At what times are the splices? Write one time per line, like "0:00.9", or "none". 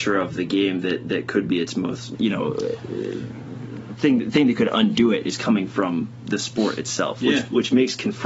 0:02.1